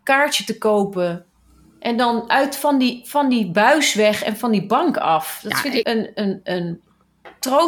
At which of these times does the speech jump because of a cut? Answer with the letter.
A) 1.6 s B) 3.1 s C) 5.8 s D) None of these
C